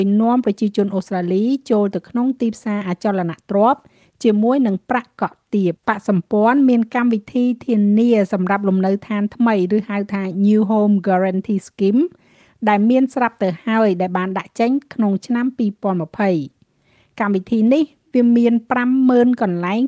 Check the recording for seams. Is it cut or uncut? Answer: cut